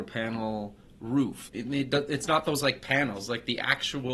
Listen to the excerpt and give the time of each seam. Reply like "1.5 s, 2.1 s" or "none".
1.5 s

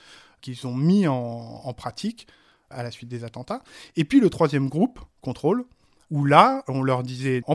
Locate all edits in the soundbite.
6.1 s

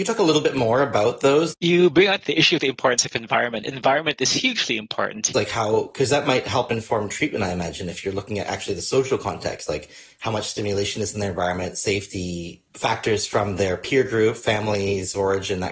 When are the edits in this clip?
1.5 s, 3.6 s, 5.3 s

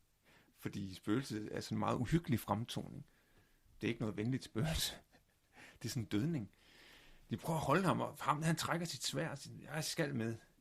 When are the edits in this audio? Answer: none

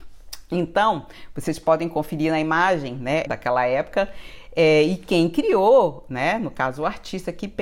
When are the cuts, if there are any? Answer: 3.3 s

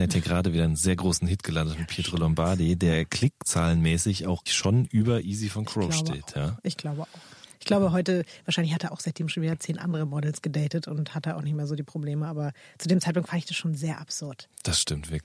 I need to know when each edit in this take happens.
4.5 s

